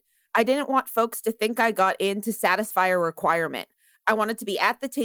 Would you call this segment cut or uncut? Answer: cut